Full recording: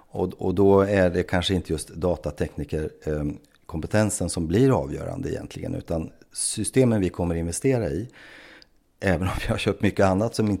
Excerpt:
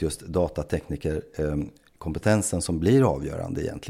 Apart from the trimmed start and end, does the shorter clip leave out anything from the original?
no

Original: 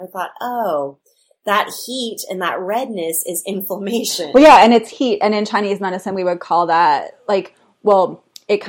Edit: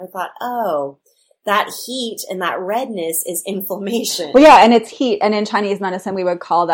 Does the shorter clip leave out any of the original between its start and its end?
no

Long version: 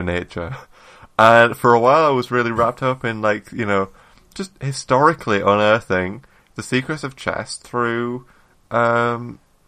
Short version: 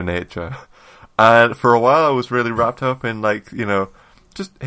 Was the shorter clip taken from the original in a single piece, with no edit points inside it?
yes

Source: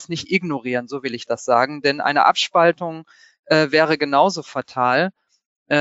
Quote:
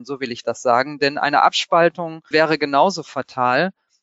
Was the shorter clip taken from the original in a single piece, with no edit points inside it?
no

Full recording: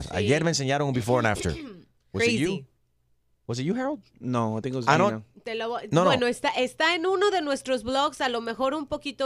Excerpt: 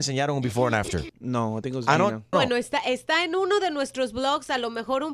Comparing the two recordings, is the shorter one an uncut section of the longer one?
no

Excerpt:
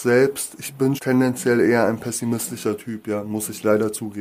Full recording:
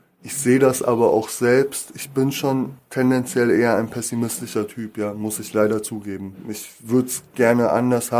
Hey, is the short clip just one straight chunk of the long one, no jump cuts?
no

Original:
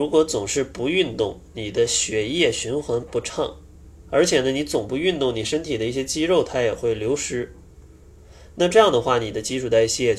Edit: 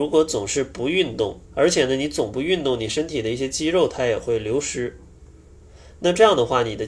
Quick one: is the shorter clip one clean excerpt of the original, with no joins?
no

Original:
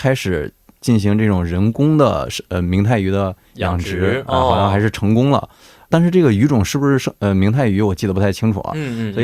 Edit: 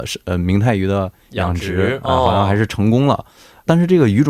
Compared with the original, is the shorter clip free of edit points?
yes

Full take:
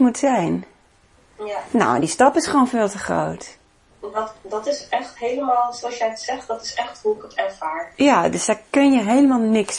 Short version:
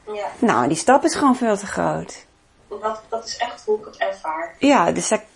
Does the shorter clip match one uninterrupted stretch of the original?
no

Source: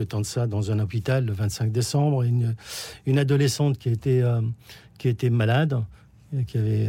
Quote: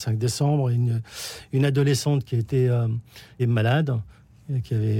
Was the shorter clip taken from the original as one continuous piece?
no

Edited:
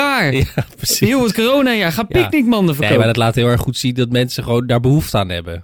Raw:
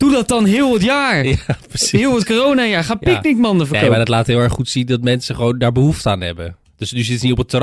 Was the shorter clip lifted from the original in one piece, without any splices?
yes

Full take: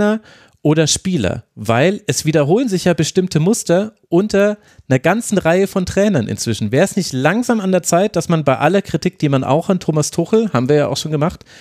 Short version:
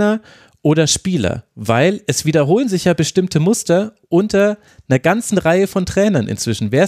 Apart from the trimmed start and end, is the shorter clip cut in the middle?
no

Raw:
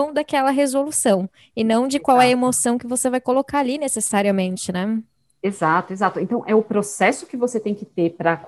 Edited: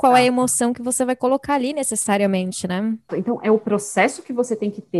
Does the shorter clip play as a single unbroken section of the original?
no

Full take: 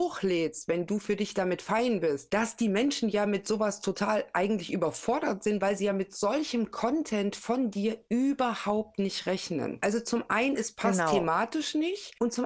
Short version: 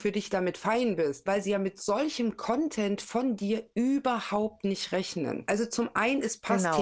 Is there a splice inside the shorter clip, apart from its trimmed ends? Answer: yes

